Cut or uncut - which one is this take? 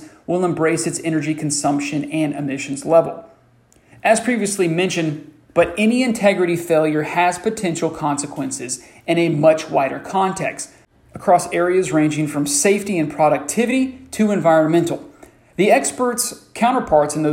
cut